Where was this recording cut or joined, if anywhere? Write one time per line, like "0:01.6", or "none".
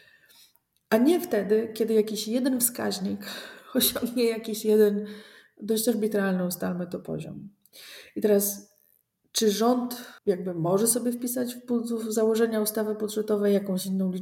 0:10.2